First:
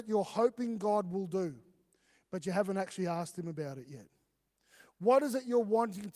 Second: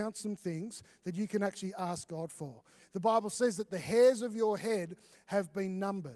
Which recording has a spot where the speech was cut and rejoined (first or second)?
second